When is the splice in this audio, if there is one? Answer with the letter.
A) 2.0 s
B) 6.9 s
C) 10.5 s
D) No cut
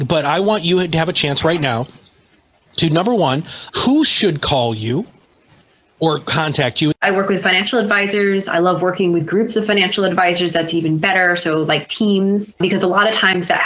B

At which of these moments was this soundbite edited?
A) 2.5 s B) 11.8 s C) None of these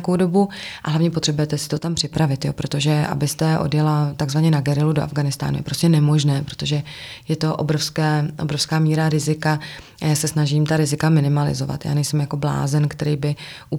C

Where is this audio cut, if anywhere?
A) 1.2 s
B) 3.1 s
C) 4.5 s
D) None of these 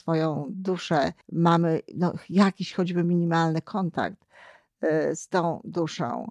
A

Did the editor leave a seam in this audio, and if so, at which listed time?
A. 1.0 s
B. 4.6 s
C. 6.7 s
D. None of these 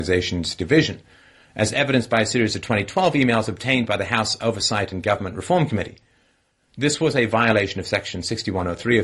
C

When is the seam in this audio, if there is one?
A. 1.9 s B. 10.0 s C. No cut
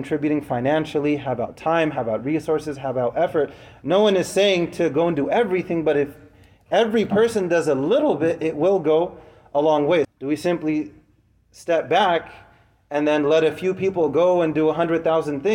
B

